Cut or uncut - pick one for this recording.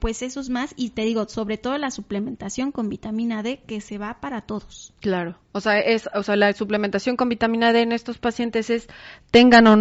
uncut